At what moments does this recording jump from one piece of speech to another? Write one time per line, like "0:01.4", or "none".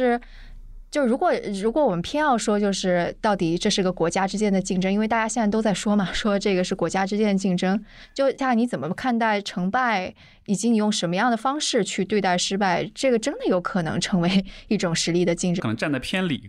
0:08.4
0:15.6

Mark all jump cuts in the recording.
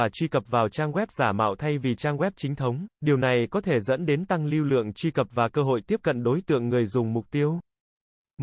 0:02.9

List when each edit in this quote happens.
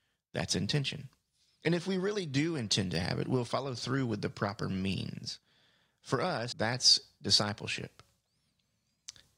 0:06.5

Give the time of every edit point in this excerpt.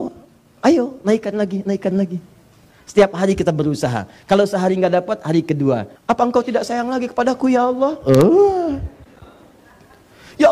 0:02.7
0:06.0

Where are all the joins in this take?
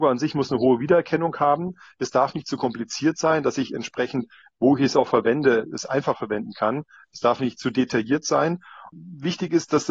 0:08.9

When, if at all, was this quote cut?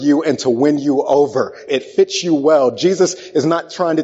0:01.7

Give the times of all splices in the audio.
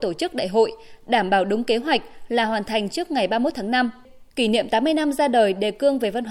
0:04.3

